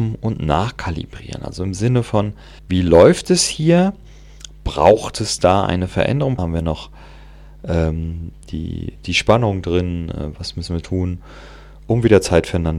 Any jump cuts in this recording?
yes; 3 cuts; at 2.6 s, 6.4 s, 8.4 s

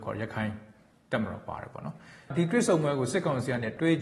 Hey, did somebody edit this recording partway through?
no; 0 cuts

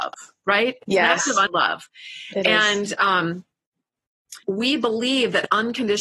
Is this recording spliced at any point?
yes; 2 cuts; at 1.5 s, 4.4 s

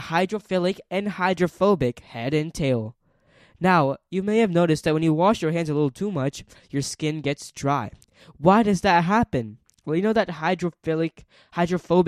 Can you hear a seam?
no; 0 cuts

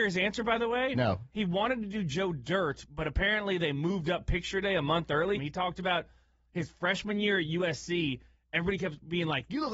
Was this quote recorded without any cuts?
no; 1 cut; at 5.3 s

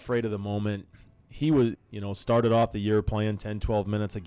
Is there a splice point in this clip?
yes; 1 cut; at 1.7 s

